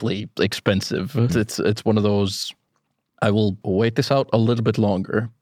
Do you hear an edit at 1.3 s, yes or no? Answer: yes